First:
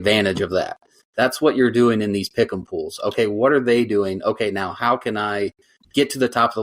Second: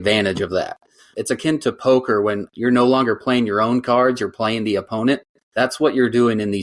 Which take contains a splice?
first; 1 cut; at 1.0 s

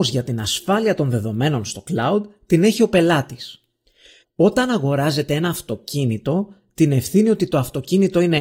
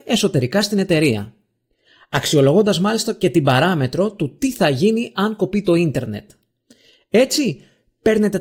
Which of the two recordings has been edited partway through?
first; 1 cut; at 4.2 s

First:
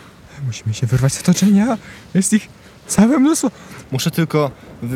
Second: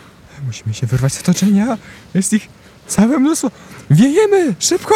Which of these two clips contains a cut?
first; 1 cut; at 3.8 s

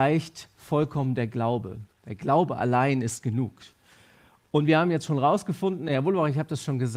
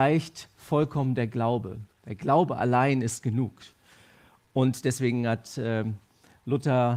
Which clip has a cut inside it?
first; 1 cut; at 4.4 s

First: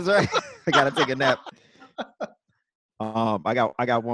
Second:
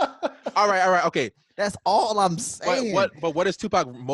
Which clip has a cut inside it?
second; 1 cut; at 1.5 s

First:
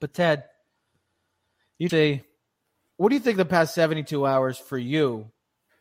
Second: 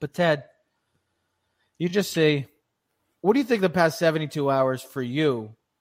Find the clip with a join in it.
first; 1 cut; at 1.9 s

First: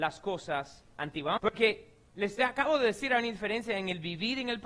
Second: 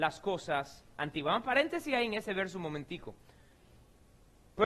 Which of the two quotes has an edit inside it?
first; 1 cut; at 1.4 s

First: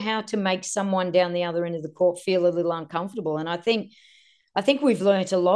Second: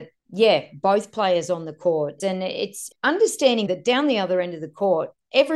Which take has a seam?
second; 2 cuts; at 2.2 s, 3.7 s

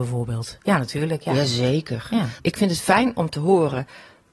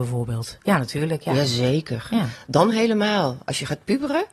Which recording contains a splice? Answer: first; 1 cut; at 2.4 s

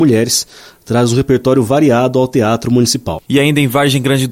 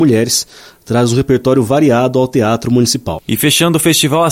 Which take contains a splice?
first; 1 cut; at 3.2 s

